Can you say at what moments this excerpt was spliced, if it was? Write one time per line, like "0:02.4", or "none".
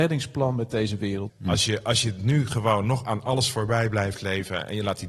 0:01.3